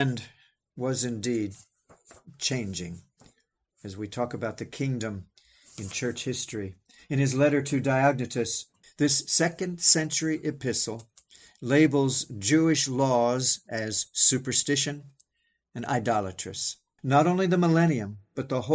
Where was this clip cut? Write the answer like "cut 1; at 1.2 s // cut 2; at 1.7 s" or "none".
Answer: cut 1; at 8.8 s // cut 2; at 17.0 s